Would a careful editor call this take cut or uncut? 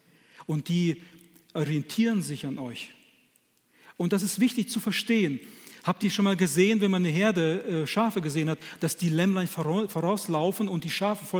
uncut